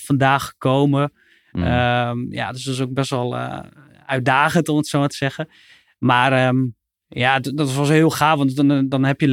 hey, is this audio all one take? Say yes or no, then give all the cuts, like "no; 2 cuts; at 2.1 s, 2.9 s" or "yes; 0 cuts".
yes; 0 cuts